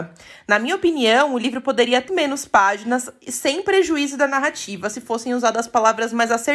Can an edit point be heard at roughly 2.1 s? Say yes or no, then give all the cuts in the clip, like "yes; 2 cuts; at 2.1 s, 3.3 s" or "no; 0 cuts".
yes; 1 cut; at 2.1 s